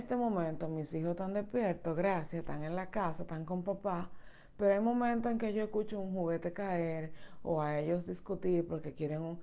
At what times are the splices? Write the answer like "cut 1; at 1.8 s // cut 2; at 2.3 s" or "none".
none